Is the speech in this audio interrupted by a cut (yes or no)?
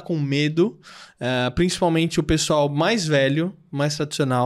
no